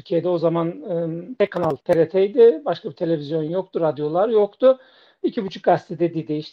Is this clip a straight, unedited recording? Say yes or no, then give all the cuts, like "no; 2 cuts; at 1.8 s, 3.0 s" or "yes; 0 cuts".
yes; 0 cuts